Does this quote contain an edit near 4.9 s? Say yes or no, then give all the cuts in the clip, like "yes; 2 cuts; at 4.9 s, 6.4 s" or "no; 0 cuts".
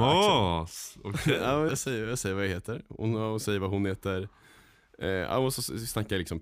no; 1 cut; at 1.7 s